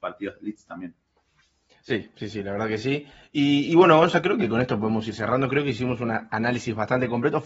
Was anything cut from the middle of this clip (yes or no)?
no